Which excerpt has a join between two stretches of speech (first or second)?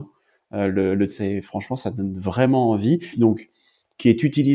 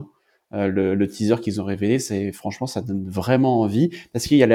first